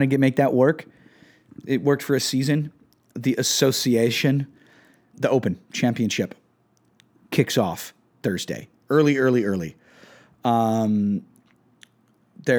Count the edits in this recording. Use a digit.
2